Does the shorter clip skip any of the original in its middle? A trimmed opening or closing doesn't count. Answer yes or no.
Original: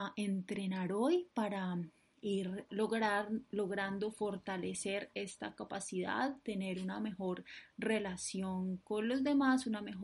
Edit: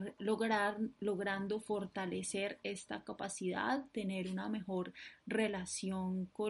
no